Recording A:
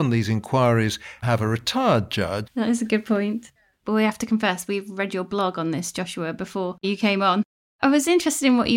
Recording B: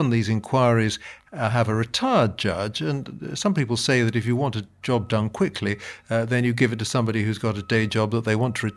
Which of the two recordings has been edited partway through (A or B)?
A